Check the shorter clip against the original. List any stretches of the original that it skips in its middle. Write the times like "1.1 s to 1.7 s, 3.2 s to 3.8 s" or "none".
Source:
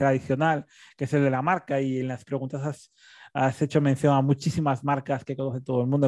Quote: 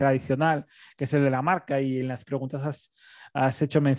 none